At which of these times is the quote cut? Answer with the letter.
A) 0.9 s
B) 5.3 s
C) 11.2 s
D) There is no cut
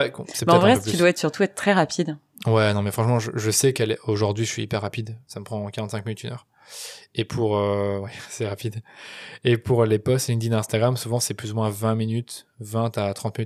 B